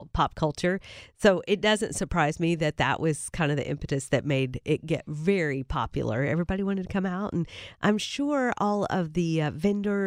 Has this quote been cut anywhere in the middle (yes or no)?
no